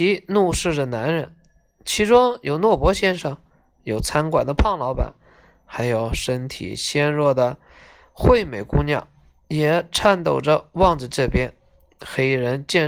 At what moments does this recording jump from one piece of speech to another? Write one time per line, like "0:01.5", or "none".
none